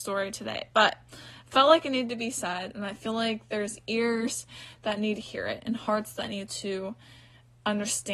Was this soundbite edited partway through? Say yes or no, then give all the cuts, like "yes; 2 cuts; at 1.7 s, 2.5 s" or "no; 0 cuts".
no; 0 cuts